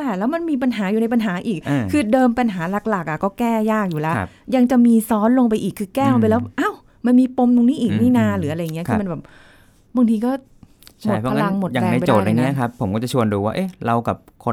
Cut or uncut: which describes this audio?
uncut